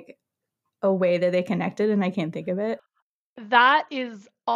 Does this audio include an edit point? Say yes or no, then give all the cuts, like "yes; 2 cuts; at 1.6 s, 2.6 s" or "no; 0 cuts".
no; 0 cuts